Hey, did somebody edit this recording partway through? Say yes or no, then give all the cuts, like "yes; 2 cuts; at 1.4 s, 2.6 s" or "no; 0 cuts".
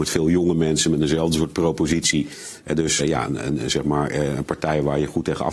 yes; 1 cut; at 3.0 s